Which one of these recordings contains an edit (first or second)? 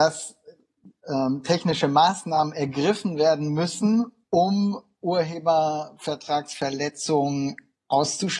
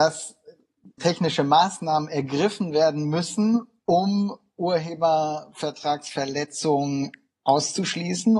second